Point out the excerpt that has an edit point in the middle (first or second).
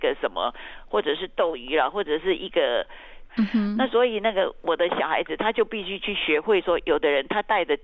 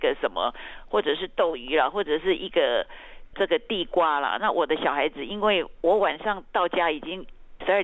first